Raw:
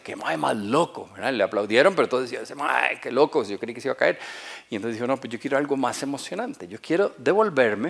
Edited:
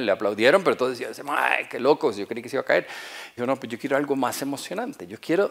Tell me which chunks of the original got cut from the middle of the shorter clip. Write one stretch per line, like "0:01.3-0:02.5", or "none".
0:04.7-0:05.0